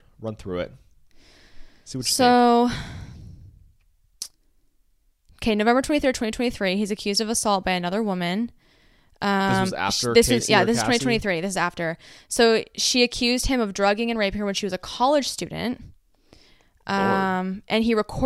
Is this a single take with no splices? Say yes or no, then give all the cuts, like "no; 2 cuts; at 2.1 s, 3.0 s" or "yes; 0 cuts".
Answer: yes; 0 cuts